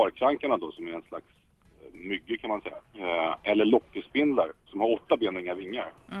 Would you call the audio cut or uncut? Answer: cut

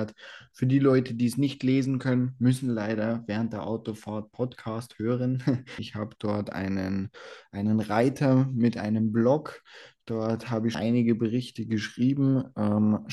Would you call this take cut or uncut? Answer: cut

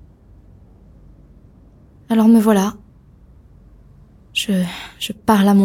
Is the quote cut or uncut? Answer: uncut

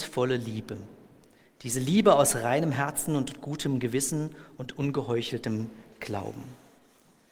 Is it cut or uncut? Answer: uncut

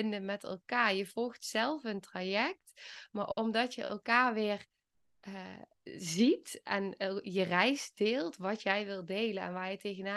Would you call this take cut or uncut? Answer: uncut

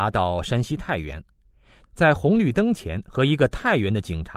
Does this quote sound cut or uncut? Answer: uncut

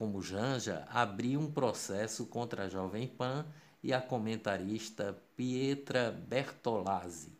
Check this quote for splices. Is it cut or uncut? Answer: uncut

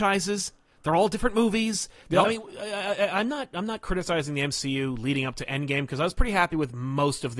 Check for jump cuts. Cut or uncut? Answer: cut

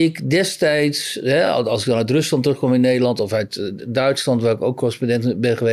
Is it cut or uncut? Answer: uncut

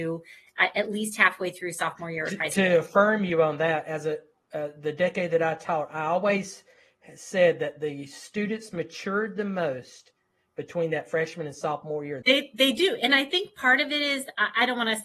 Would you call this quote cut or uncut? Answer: cut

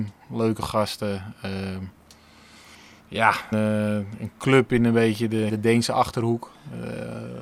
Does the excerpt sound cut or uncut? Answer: cut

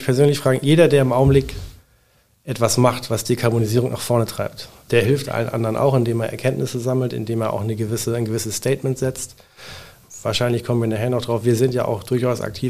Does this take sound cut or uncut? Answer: uncut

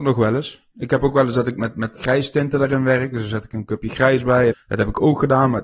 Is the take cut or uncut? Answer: cut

